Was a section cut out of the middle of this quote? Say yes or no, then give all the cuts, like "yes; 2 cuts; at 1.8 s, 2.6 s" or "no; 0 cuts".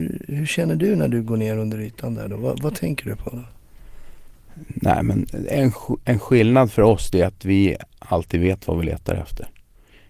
no; 0 cuts